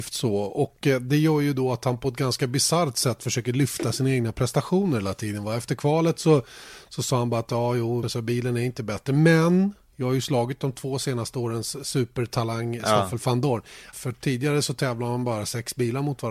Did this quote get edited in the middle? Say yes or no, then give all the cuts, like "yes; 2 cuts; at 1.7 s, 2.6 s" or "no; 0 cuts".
yes; 2 cuts; at 8.0 s, 13.9 s